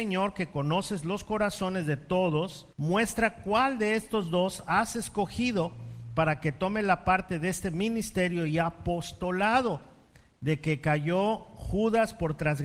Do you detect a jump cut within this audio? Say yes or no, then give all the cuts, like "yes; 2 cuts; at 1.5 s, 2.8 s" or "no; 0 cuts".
yes; 1 cut; at 2.7 s